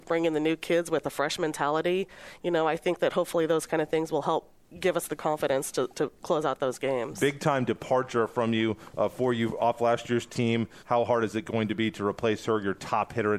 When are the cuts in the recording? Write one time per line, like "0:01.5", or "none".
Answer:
0:10.8